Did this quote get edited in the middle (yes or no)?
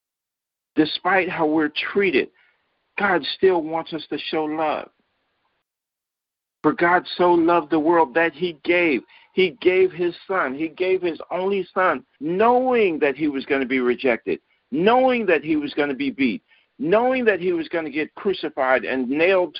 yes